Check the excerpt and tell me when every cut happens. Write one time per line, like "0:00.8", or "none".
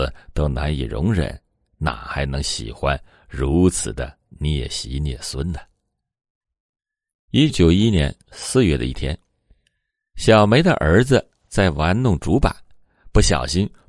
0:07.5